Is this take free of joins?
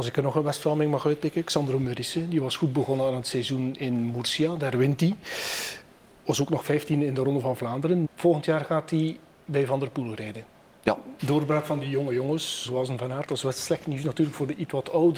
no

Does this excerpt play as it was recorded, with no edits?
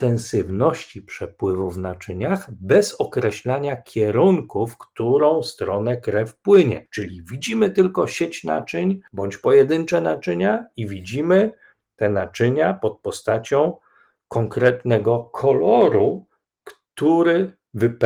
yes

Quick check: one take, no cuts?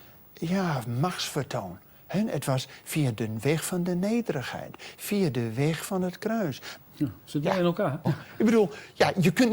no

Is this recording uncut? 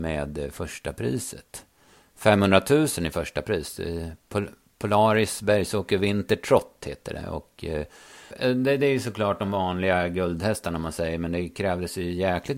no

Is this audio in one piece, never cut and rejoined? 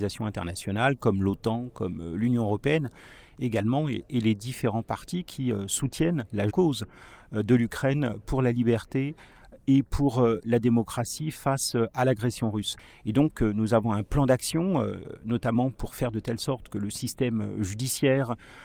no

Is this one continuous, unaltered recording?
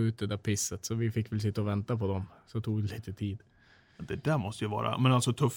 yes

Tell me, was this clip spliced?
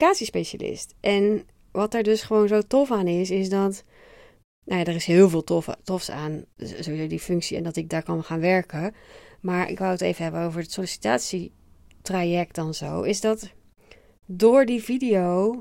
no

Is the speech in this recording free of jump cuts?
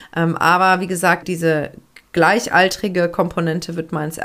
no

